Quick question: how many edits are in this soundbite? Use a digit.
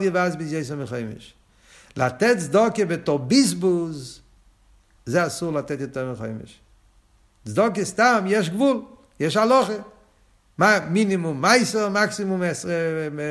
0